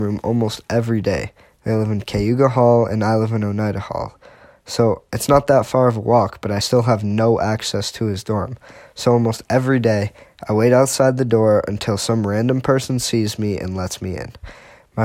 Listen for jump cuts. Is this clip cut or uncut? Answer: uncut